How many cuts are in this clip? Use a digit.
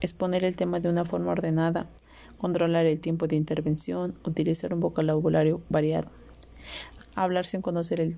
1